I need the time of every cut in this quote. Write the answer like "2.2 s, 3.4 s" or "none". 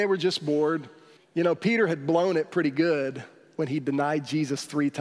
1.2 s